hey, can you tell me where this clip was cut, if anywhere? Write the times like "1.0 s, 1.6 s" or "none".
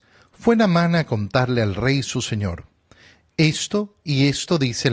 none